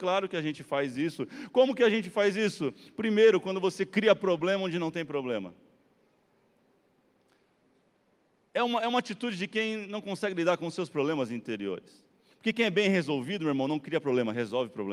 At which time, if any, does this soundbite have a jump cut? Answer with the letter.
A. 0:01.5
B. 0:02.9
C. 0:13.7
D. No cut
D